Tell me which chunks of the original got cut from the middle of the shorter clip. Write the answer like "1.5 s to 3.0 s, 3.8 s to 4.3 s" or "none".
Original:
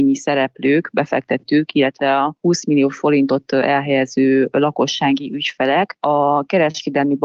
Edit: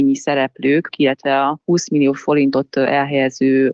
0.9 s to 1.7 s